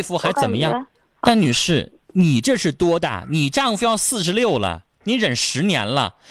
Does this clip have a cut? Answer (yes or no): yes